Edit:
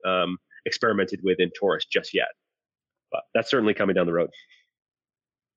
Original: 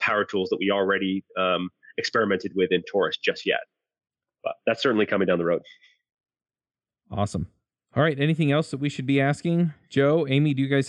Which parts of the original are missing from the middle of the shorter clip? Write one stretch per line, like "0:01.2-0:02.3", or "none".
none